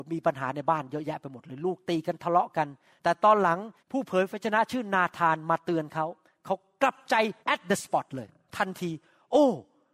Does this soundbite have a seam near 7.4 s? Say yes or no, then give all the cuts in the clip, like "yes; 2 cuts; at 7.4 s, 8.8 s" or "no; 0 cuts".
yes; 2 cuts; at 3.8 s, 7.4 s